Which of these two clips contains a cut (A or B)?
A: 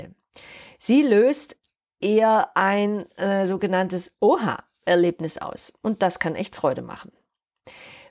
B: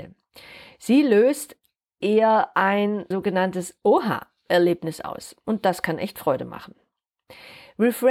B